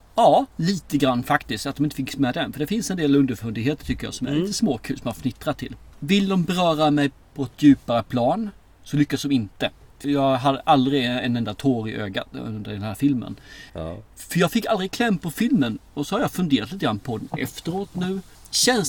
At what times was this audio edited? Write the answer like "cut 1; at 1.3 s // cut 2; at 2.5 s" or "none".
cut 1; at 10.0 s // cut 2; at 13.7 s